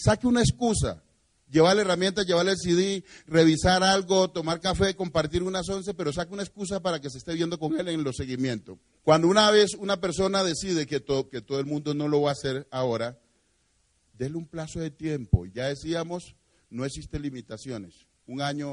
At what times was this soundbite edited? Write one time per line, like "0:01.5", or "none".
0:09.0
0:11.3